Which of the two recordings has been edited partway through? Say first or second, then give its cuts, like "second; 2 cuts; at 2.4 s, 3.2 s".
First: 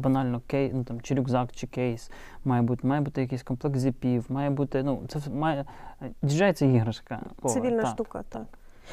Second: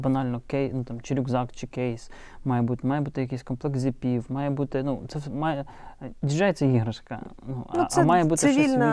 first; 1 cut; at 7.4 s